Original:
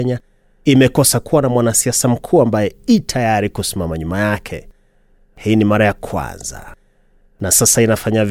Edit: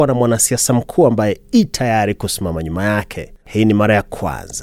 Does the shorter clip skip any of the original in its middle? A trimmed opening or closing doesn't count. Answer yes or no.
yes